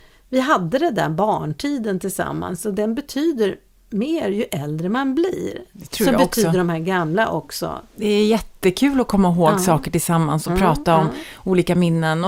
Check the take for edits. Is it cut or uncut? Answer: uncut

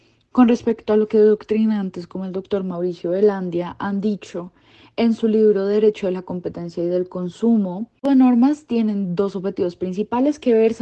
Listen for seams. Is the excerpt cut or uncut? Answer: cut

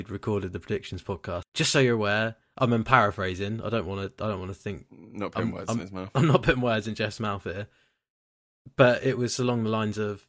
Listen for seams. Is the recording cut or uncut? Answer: cut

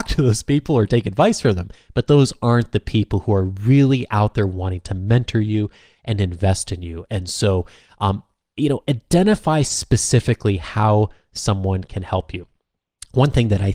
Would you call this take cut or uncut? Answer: uncut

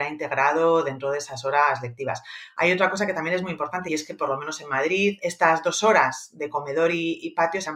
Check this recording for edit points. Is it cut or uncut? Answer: uncut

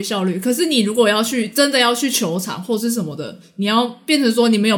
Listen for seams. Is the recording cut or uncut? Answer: uncut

